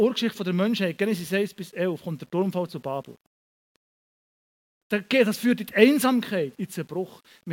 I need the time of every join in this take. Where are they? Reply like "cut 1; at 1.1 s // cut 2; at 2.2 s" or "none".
cut 1; at 4.8 s // cut 2; at 6.6 s